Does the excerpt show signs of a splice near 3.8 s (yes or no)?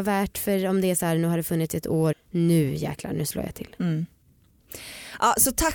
no